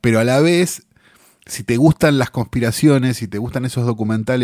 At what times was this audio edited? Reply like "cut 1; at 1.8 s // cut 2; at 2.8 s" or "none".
none

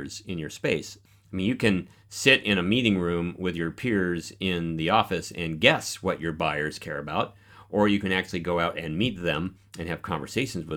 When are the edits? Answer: none

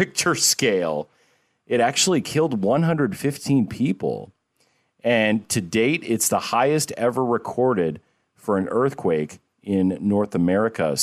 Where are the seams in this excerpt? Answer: none

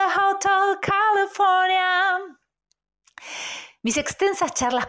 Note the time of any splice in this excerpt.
none

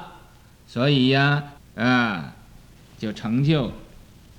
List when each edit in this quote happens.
cut 1; at 1.6 s

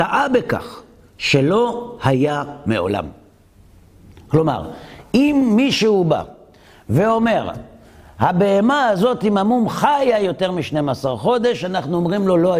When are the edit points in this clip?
none

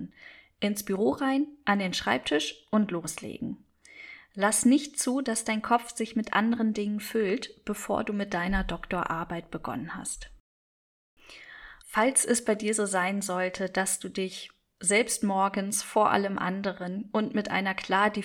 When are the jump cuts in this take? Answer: cut 1; at 11.8 s

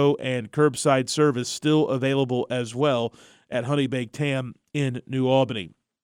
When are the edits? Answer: none

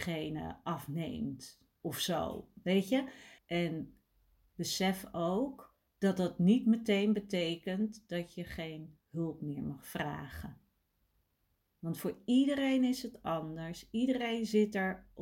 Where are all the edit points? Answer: cut 1; at 3.4 s // cut 2; at 5.9 s

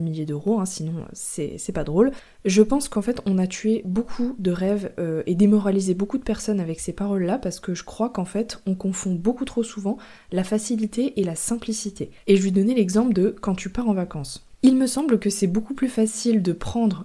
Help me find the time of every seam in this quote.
cut 1; at 12.2 s

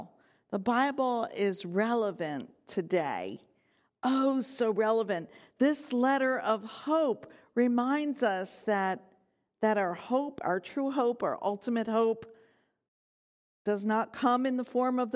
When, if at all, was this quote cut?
none

